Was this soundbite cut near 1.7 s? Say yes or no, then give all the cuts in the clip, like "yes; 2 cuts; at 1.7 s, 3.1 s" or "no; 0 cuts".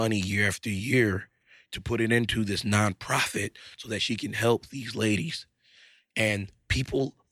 no; 0 cuts